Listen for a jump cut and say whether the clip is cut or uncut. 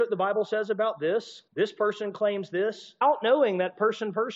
cut